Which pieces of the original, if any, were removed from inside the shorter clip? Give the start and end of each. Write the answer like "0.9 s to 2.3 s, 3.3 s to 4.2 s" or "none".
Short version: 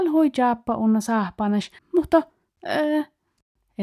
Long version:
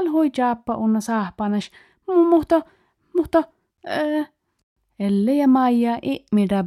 1.8 s to 3.0 s